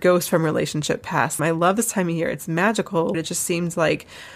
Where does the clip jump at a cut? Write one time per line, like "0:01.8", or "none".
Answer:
0:01.4
0:03.1